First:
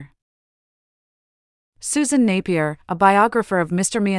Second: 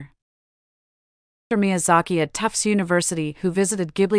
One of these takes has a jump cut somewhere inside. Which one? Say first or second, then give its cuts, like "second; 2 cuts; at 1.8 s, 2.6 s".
second; 1 cut; at 1.5 s